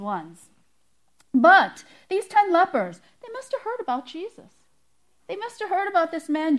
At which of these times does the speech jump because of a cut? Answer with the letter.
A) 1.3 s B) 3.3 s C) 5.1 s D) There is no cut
D